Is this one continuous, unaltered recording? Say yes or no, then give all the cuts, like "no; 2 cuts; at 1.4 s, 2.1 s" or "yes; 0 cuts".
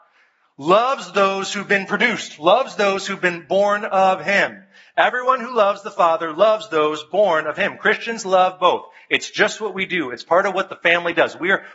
yes; 0 cuts